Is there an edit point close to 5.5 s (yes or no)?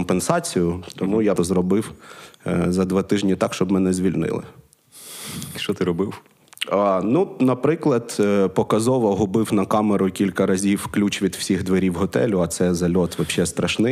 no